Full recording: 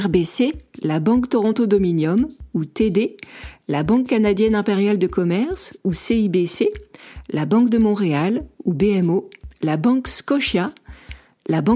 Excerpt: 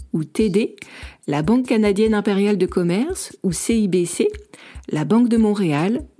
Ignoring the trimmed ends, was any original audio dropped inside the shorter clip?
no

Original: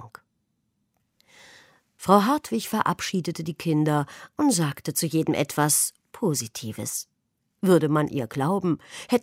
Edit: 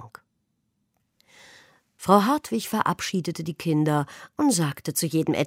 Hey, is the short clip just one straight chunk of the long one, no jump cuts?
yes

